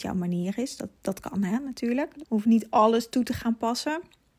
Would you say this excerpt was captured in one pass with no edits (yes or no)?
no